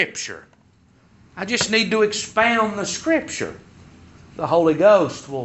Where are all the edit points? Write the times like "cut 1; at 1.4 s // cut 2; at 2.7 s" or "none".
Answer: none